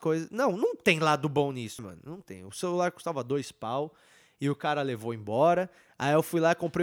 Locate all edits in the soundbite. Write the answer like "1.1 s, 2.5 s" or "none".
1.8 s